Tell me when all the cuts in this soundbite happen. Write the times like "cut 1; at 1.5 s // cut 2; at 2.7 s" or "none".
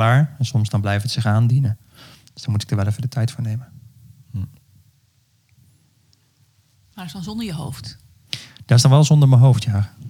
none